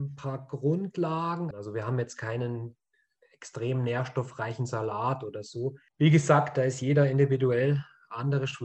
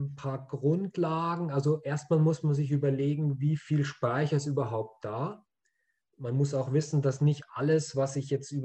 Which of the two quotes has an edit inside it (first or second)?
first